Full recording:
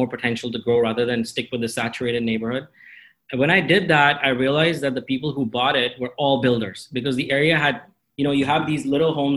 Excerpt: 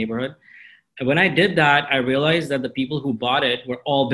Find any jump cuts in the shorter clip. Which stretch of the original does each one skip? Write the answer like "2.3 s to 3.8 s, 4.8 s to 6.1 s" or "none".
none